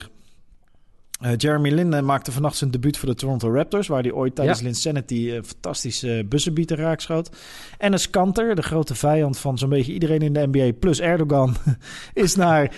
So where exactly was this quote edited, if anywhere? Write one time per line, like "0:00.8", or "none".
none